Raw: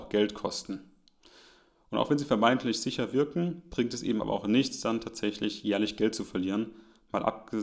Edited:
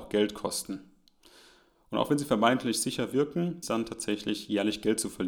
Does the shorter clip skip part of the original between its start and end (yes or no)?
yes